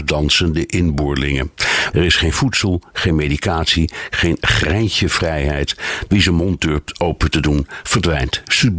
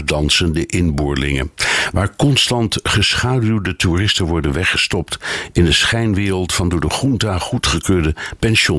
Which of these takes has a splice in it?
first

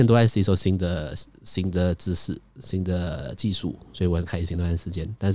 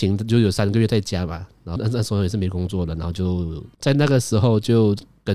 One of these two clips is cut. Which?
second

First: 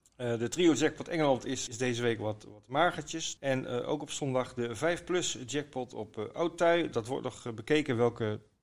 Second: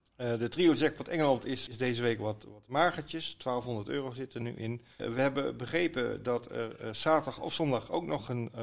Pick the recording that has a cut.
first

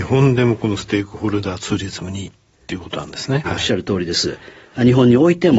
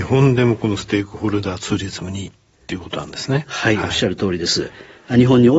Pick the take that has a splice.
first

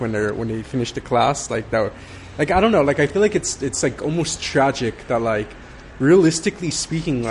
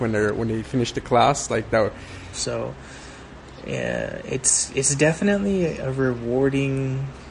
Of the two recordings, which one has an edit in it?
second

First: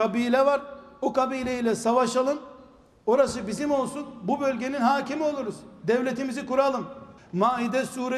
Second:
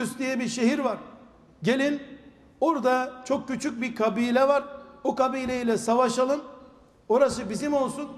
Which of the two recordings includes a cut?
first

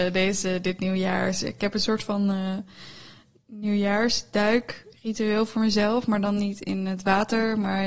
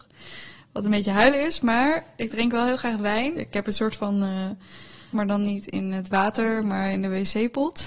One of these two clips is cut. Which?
second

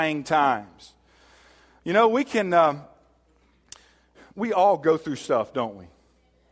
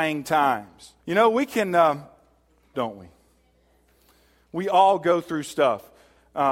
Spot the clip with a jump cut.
second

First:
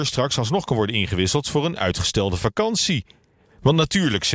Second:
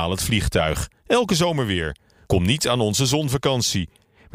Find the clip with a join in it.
first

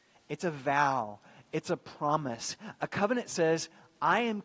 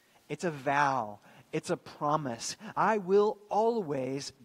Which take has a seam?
second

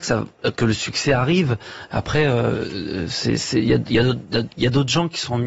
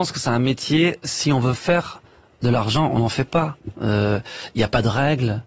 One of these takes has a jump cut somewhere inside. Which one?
second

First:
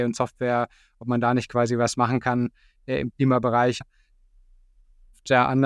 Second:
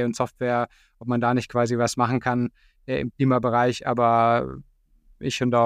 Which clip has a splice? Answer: first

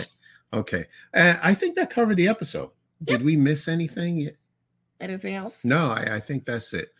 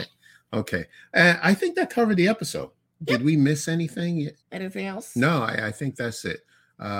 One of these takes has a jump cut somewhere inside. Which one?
second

